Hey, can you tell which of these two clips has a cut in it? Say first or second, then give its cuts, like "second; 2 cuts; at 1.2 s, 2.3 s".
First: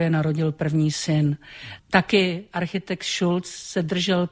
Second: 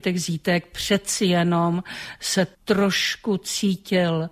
second; 1 cut; at 2.5 s